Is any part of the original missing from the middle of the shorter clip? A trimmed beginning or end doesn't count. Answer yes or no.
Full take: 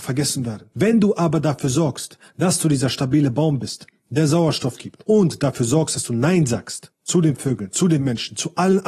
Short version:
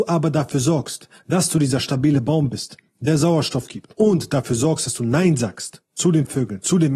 no